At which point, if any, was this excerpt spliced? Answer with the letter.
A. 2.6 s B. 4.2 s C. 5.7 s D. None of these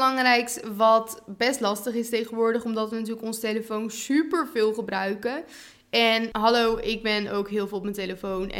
D